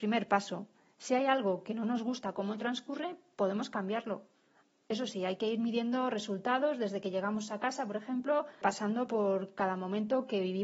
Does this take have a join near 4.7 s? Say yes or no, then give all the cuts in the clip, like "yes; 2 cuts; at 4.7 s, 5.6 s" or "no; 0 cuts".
no; 1 cut; at 8.6 s